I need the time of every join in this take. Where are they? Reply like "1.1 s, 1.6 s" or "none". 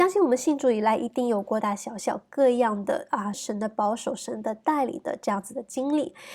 1.6 s, 3.3 s